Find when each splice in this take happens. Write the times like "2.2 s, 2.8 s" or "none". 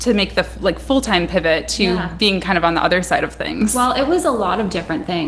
none